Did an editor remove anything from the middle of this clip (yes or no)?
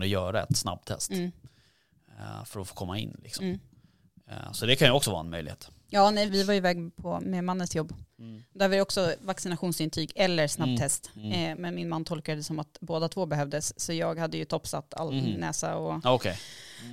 yes